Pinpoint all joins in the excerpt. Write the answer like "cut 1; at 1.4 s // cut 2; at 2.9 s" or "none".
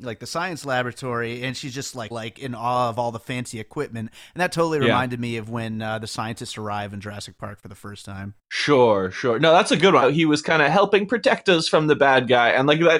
cut 1; at 2.1 s // cut 2; at 8.4 s // cut 3; at 10.0 s